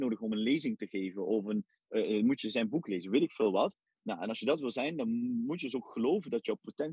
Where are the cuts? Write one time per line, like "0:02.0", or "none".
none